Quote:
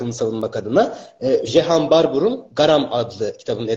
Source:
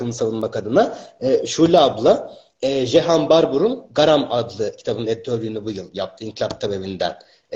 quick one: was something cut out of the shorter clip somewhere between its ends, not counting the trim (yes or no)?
yes